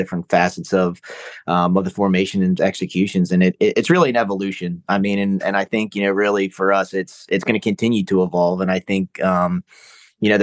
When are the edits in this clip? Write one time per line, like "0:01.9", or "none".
0:02.6